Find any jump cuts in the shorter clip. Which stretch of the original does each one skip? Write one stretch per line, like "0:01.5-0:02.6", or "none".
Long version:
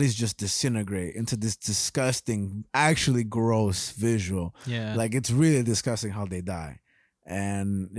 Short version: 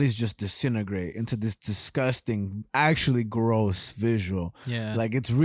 none